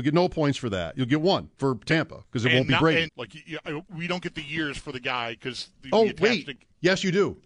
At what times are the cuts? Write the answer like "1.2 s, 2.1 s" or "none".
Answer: 1.5 s, 3.1 s